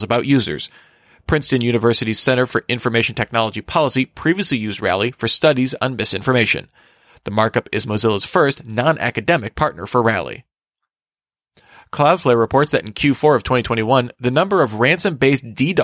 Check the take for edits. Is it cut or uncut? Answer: uncut